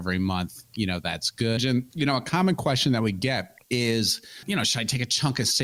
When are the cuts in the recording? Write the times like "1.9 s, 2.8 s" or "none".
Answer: 1.6 s